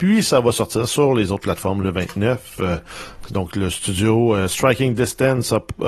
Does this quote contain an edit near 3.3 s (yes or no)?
no